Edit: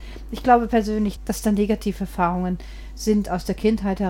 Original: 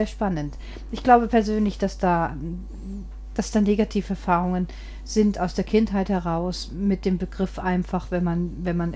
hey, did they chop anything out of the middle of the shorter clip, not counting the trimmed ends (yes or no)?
yes